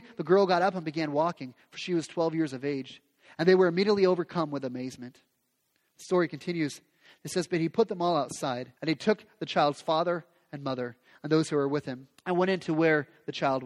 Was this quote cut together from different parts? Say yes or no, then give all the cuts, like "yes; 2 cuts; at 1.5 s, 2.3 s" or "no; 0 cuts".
yes; 3 cuts; at 5.9 s, 8.8 s, 12.2 s